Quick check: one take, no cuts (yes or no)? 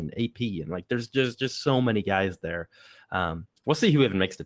yes